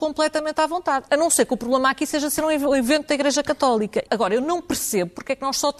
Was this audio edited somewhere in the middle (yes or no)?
yes